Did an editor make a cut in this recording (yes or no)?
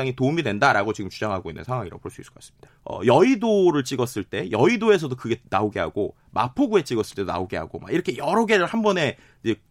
yes